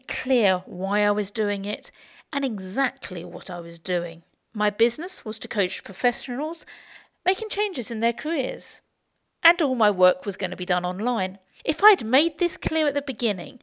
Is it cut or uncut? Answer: cut